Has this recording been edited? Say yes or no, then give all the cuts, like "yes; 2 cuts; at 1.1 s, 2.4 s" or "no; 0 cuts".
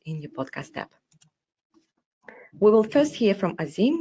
yes; 1 cut; at 2.5 s